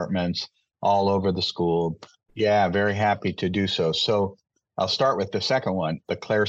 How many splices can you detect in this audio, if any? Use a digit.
1